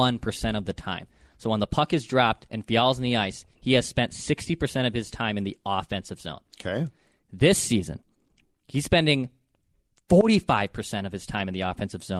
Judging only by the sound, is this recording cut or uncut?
uncut